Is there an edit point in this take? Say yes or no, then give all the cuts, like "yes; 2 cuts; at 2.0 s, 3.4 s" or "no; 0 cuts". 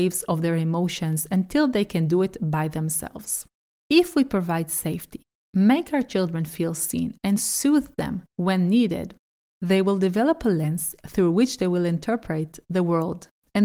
yes; 1 cut; at 3.7 s